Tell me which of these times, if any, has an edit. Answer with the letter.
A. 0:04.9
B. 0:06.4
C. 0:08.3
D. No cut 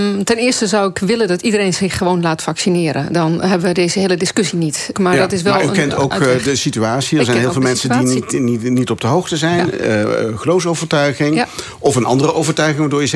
A